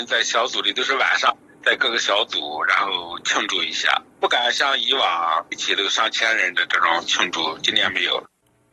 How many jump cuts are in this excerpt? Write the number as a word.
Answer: one